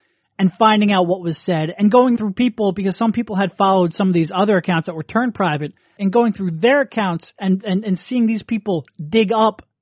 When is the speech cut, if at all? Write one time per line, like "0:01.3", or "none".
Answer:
0:02.2
0:06.0